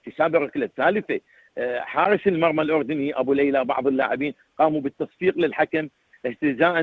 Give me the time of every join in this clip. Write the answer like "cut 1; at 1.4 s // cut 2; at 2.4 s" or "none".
none